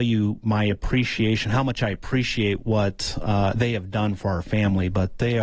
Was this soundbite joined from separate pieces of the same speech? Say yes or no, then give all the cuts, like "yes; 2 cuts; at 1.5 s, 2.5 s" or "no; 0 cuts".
no; 0 cuts